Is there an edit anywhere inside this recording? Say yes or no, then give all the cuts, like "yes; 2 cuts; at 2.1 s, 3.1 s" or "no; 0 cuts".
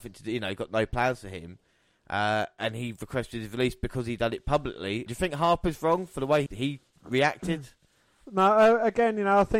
yes; 2 cuts; at 5.1 s, 6.5 s